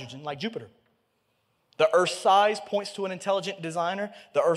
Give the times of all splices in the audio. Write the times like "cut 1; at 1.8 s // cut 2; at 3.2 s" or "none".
cut 1; at 1.7 s